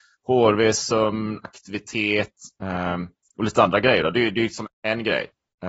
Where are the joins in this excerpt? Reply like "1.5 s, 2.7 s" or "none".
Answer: 4.6 s